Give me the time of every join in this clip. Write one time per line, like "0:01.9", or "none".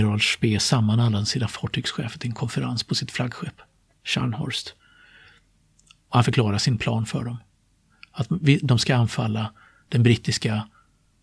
none